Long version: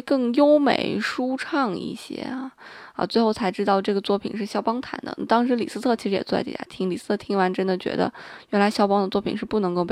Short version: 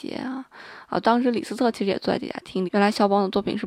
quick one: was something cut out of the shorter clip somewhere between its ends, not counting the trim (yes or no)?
yes